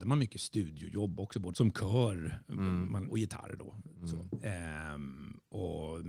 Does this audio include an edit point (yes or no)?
yes